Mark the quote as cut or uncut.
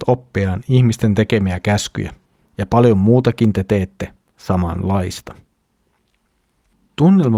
cut